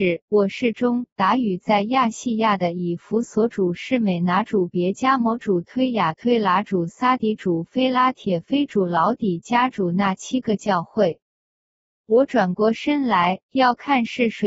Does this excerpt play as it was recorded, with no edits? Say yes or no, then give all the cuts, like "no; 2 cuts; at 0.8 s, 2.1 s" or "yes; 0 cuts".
no; 1 cut; at 1.1 s